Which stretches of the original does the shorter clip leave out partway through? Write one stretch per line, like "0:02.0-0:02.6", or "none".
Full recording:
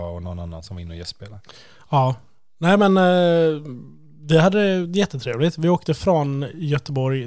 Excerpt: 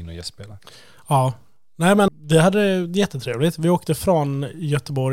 0:02.9-0:04.1